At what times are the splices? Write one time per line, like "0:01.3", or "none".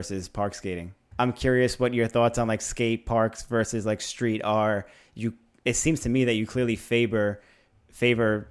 0:01.1